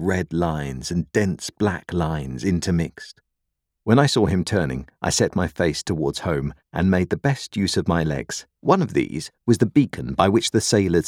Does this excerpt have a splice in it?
yes; 2 cuts; at 3.8 s, 8.6 s

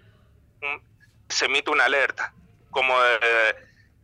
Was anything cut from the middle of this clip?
yes; 1 cut; at 1.3 s

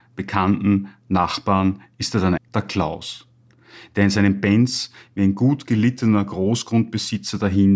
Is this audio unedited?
no; 1 cut; at 2.4 s

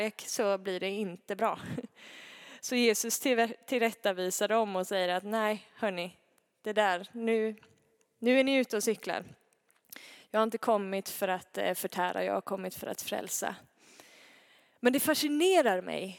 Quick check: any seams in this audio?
no; 0 cuts

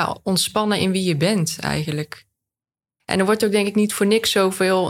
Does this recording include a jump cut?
yes; 1 cut; at 3.0 s

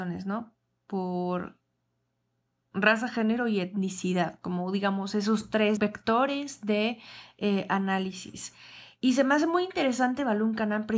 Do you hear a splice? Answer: no; 0 cuts

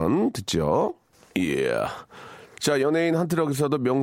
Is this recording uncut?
yes; 0 cuts

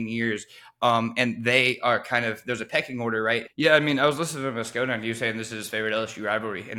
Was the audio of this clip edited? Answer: yes; 1 cut; at 3.5 s

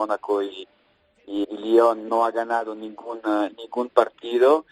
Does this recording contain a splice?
yes; 1 cut; at 1.4 s

